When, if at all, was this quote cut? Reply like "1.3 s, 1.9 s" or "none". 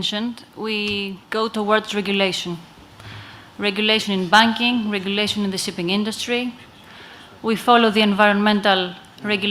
1.2 s